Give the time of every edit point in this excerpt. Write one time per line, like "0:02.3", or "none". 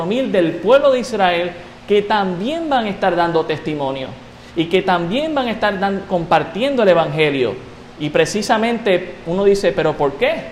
0:07.9